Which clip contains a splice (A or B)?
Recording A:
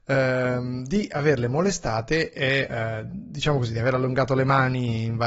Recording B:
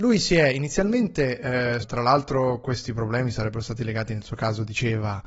B